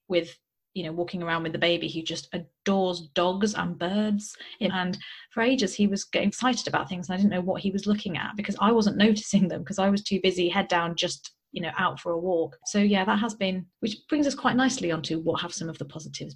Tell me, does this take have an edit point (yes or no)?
yes